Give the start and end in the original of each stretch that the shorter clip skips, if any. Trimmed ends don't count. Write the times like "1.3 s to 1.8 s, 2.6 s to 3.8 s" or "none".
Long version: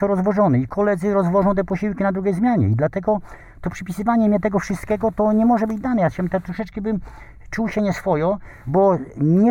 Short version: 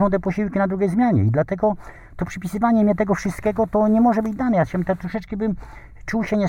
none